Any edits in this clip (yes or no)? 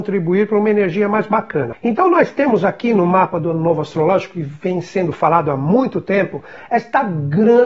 yes